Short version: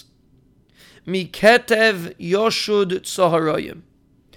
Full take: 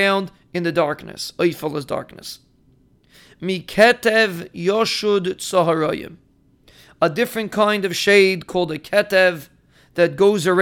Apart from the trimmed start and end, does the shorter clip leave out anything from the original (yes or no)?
no